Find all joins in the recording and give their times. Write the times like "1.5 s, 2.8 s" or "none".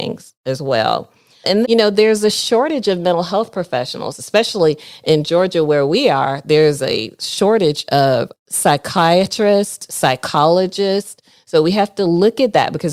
1.6 s

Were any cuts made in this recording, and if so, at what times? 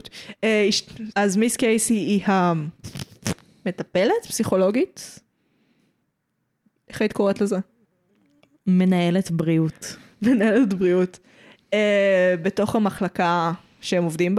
1.1 s

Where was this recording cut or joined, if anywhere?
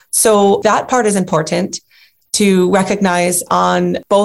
none

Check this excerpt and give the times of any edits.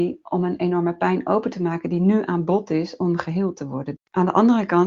4.0 s

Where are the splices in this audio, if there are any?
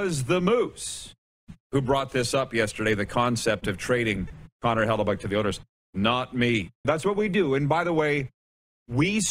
6.8 s

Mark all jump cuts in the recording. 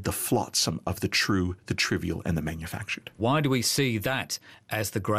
3.2 s

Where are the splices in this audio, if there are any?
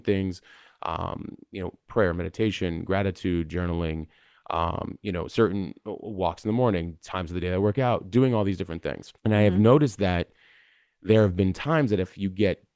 9.2 s

